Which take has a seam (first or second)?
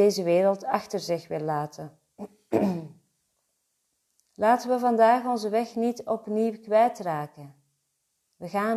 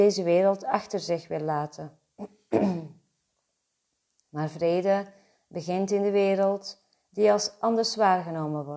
first